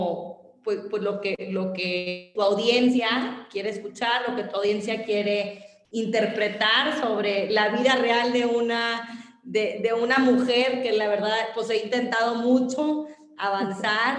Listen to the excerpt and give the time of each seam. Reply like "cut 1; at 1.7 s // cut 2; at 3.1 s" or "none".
cut 1; at 2.4 s

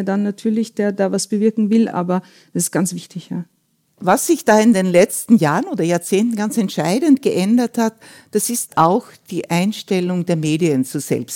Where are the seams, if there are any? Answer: none

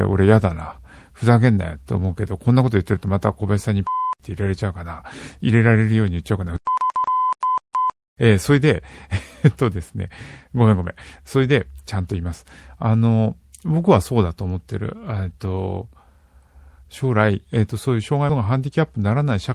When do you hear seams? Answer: none

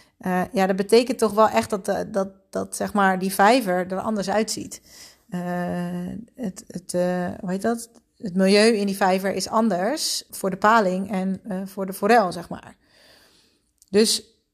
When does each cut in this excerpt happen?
cut 1; at 10.3 s

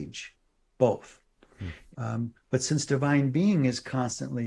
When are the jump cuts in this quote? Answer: cut 1; at 1.9 s

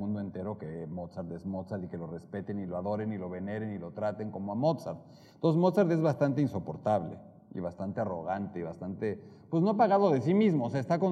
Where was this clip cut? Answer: none

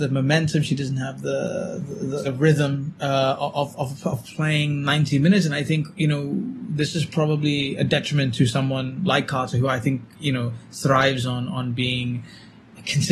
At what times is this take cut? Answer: cut 1; at 2.2 s

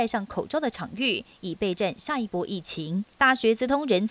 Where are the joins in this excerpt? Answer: cut 1; at 3.1 s

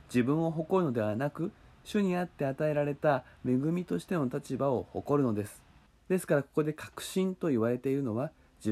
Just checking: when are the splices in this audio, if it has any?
cut 1; at 5.9 s

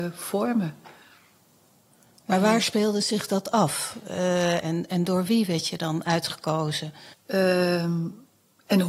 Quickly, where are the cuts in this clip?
cut 1; at 4.6 s // cut 2; at 7.1 s

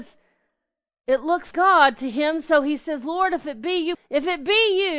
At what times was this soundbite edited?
cut 1; at 1.5 s // cut 2; at 3.9 s

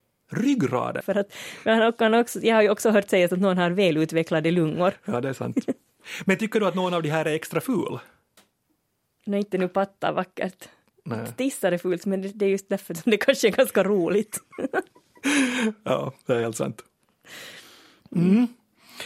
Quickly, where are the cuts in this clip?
cut 1; at 1.0 s

